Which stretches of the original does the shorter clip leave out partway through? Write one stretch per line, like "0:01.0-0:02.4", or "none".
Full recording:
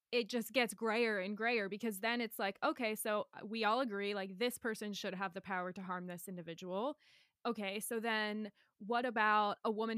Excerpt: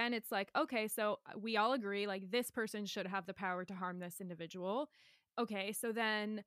none